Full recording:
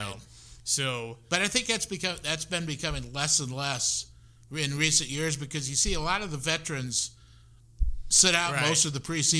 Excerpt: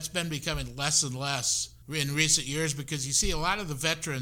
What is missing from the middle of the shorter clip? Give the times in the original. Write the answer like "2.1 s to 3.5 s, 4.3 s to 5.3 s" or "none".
4.2 s to 4.4 s

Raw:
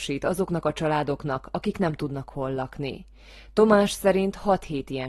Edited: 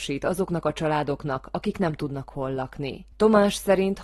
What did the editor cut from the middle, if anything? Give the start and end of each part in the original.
3.1 s to 3.5 s

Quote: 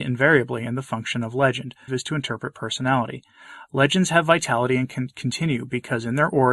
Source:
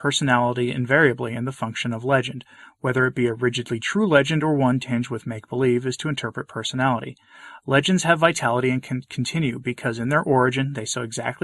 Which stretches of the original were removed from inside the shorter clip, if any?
2.6 s to 5.8 s

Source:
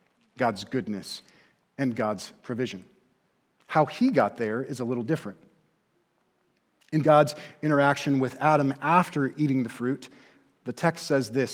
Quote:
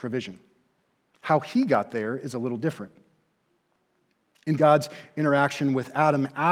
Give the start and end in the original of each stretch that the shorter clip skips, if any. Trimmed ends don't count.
none

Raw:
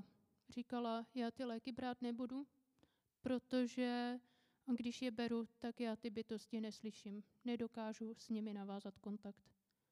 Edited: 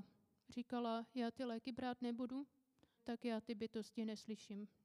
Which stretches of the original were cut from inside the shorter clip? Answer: 3.0 s to 5.5 s

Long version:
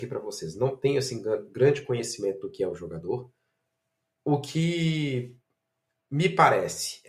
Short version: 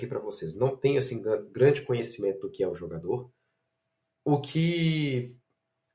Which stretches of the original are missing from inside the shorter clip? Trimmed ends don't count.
none

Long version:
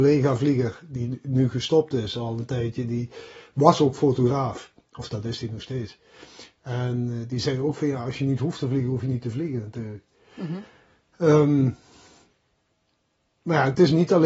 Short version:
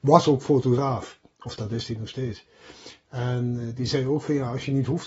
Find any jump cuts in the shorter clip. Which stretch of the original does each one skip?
none

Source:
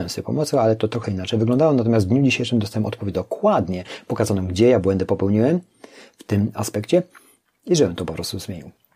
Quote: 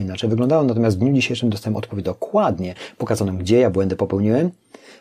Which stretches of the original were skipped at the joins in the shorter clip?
none

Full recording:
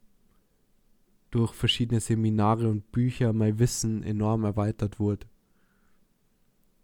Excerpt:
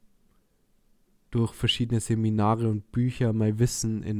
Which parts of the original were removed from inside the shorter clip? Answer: none

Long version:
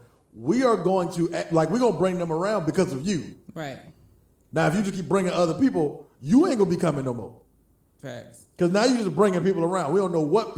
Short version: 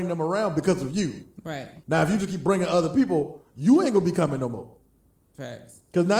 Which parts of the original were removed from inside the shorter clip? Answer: 3.9 s to 4.5 s

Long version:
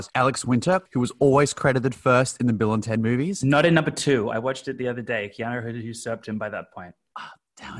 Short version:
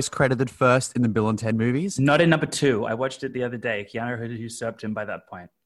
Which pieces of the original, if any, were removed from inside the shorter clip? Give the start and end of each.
none

